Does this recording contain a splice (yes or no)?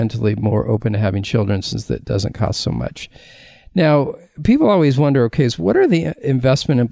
no